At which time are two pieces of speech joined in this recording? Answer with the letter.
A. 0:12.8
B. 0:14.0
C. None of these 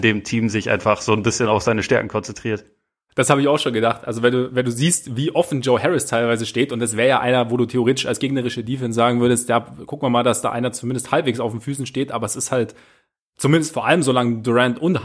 C